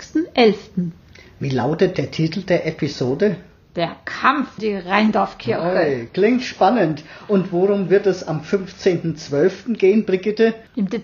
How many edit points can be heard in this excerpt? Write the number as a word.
one